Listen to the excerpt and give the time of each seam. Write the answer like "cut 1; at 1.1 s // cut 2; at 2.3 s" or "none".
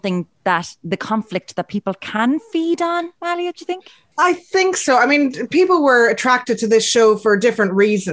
none